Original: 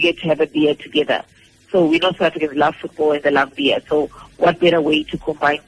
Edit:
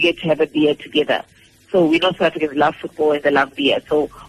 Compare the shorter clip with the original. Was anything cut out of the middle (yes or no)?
no